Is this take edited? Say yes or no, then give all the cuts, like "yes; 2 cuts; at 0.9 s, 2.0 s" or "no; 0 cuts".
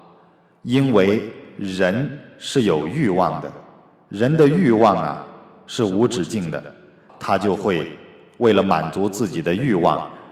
yes; 1 cut; at 7.1 s